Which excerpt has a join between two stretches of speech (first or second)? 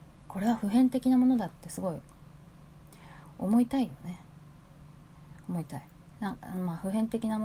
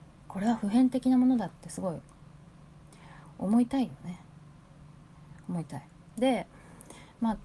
second